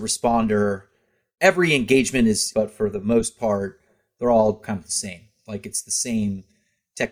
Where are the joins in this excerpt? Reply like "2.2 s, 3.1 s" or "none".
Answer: 2.5 s